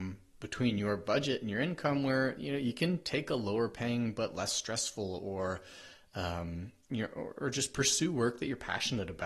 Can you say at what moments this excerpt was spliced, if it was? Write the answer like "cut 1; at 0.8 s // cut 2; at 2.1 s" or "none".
none

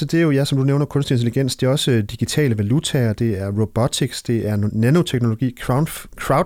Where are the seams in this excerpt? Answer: none

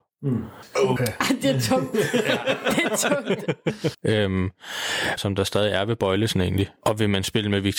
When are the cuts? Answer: cut 1; at 1.0 s // cut 2; at 3.9 s // cut 3; at 5.2 s

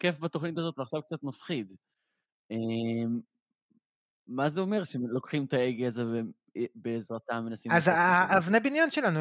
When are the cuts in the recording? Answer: none

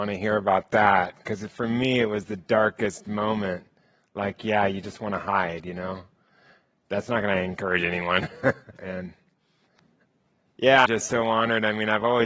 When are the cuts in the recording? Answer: cut 1; at 8.8 s // cut 2; at 10.9 s

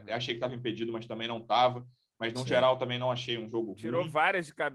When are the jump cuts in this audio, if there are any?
none

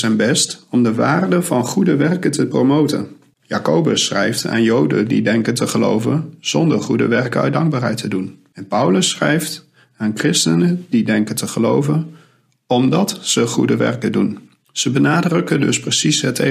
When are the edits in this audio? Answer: cut 1; at 3.4 s

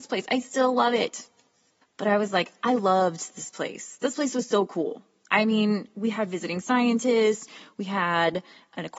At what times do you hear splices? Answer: cut 1; at 1.8 s

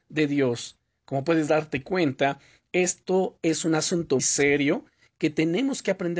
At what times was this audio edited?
cut 1; at 4.2 s

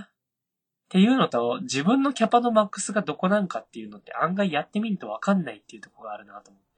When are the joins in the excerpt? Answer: none

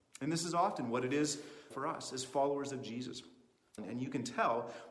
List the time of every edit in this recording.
cut 1; at 1.7 s // cut 2; at 3.8 s

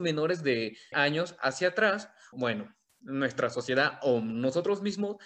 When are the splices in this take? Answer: cut 1; at 0.9 s // cut 2; at 2.3 s

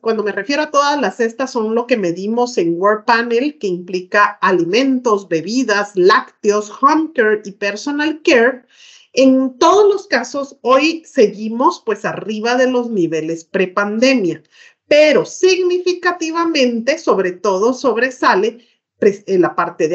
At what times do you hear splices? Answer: none

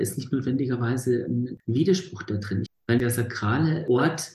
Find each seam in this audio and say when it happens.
cut 1; at 2.7 s

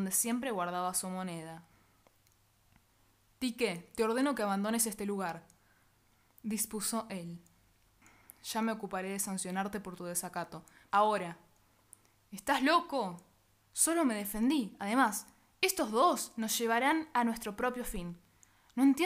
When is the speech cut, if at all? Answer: cut 1; at 10.9 s // cut 2; at 13.6 s

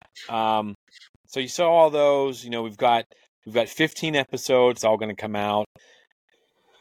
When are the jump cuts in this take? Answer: cut 1; at 4.8 s

